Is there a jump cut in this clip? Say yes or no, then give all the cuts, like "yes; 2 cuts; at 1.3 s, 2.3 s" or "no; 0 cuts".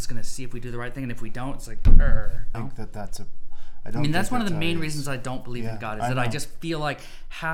yes; 1 cut; at 2.5 s